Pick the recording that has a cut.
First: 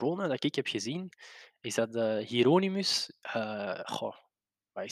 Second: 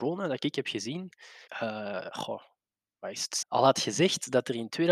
second; 2 cuts; at 1.5 s, 3.4 s

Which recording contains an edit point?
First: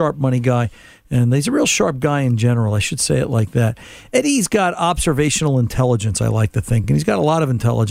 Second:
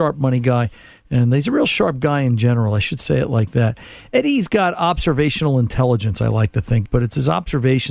second; 1 cut; at 6.8 s

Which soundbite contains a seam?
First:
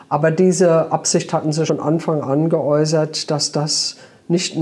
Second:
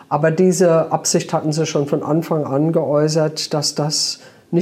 first; 1 cut; at 1.7 s

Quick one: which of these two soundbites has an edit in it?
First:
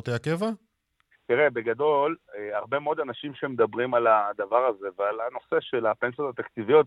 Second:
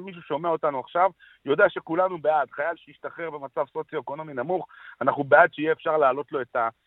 first; 1 cut; at 1.1 s

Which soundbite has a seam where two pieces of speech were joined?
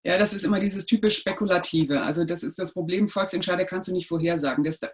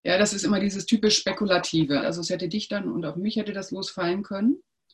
second; 1 cut; at 2.0 s

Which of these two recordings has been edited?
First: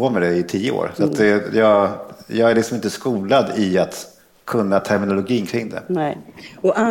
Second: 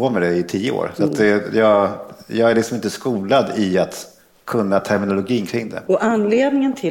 second; 1 cut; at 5.9 s

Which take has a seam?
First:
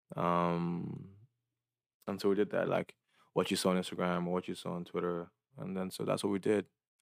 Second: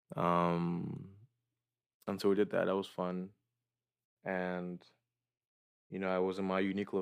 first; 2 cuts; at 2.6 s, 5.5 s

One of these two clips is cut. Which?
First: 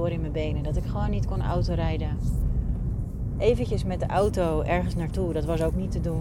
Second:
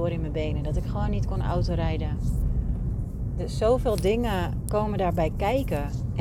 first; 1 cut; at 3.3 s

